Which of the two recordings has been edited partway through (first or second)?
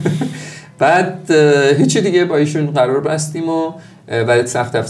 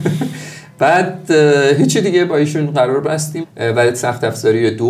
second